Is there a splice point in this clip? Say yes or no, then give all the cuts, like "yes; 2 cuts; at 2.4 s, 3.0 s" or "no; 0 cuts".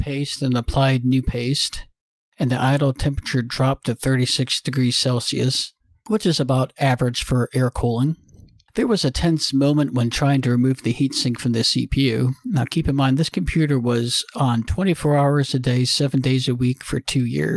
no; 0 cuts